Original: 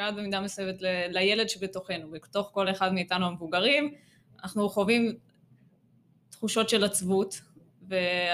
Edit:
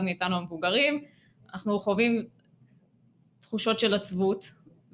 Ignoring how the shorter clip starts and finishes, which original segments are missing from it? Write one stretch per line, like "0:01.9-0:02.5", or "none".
none